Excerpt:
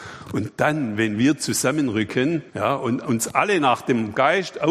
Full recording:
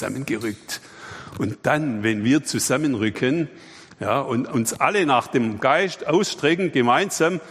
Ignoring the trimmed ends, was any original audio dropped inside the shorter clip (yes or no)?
yes